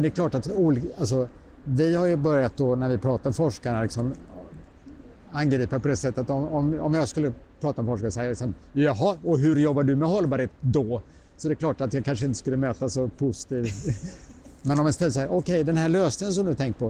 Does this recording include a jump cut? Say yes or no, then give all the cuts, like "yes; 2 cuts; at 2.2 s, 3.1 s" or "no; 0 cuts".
no; 0 cuts